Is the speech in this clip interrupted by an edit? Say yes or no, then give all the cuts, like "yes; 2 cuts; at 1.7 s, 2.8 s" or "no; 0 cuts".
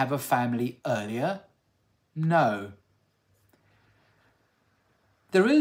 no; 0 cuts